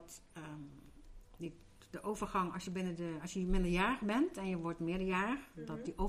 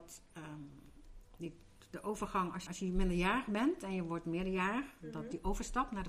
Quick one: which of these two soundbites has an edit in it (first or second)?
second